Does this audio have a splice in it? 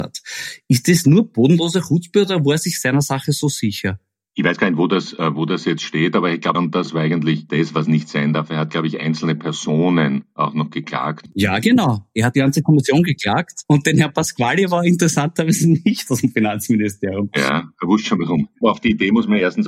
yes; 1 cut; at 6.5 s

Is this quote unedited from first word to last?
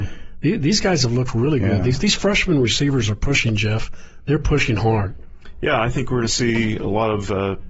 yes; 0 cuts

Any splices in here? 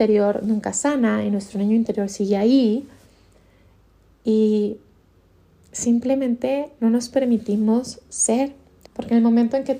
yes; 1 cut; at 8.9 s

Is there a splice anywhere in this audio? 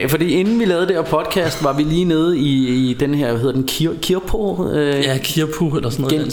no; 0 cuts

